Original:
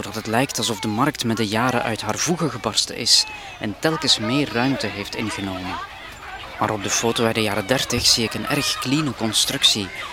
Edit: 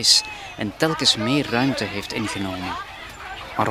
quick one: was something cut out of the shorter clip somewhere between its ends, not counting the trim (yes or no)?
no